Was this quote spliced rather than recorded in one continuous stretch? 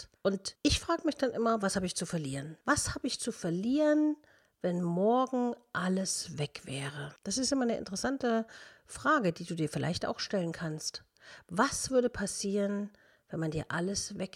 no; 0 cuts

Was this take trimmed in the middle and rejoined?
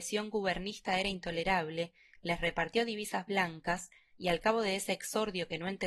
no; 0 cuts

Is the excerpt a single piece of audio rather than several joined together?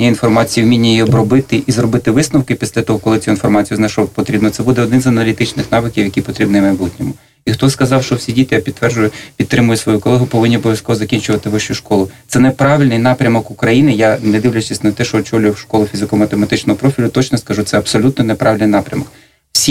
yes; 0 cuts

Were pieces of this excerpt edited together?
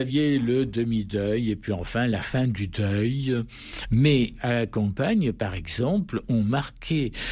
no; 0 cuts

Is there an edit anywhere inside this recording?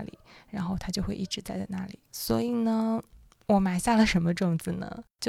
no; 0 cuts

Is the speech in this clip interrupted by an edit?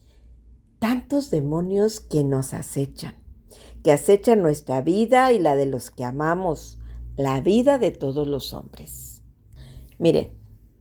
yes; 1 cut; at 9.9 s

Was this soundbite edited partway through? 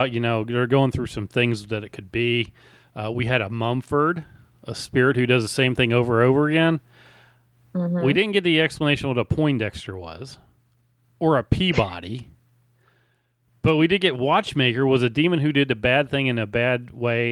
no; 0 cuts

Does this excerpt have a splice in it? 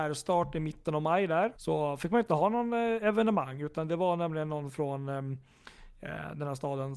yes; 1 cut; at 1.6 s

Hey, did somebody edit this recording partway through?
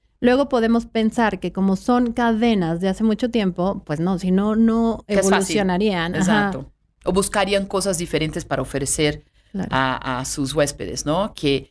no; 0 cuts

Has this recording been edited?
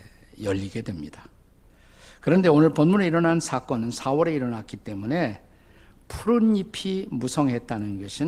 no; 0 cuts

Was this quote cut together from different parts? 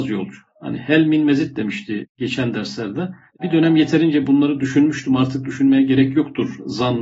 yes; 1 cut; at 3.3 s

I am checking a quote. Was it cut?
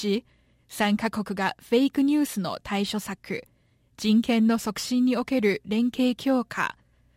no; 0 cuts

